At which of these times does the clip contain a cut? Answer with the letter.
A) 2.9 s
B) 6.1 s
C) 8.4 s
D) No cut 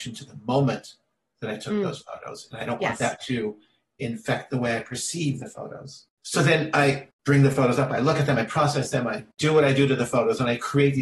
D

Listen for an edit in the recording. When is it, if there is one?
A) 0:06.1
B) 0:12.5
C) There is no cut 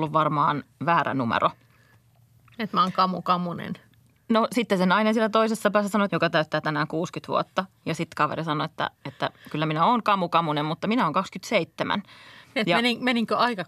A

